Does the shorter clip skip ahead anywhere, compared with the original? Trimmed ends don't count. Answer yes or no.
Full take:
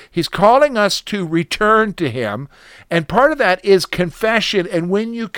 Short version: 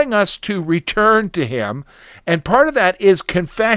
no